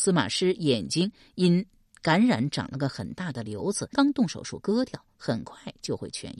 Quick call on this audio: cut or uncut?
cut